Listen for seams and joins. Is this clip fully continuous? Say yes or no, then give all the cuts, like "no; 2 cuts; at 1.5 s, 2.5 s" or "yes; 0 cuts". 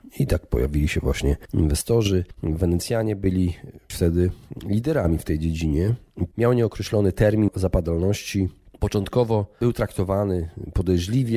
no; 2 cuts; at 3.9 s, 6.3 s